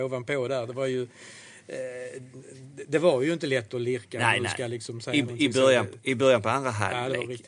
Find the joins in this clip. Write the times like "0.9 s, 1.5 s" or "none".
none

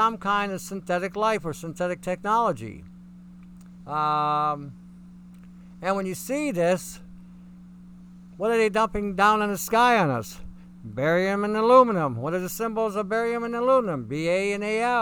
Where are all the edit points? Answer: 3.8 s

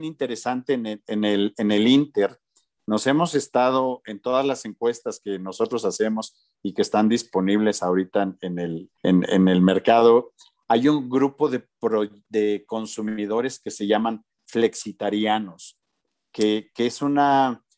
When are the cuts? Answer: 8.9 s

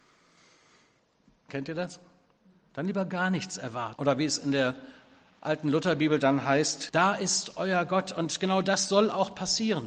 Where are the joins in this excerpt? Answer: 1.5 s, 4.0 s, 6.9 s

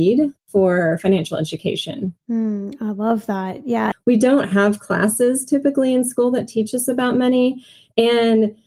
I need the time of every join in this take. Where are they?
3.9 s

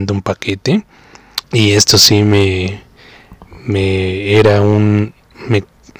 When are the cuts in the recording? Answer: 1.4 s

